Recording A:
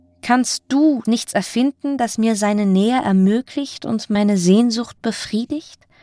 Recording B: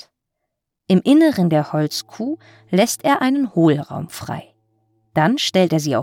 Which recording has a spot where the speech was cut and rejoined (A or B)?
A